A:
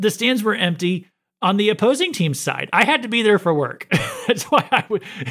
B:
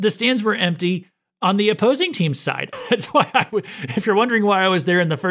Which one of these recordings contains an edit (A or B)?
B